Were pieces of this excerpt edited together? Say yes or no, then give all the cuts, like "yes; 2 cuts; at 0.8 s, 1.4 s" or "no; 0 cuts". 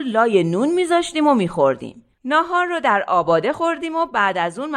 yes; 1 cut; at 2.1 s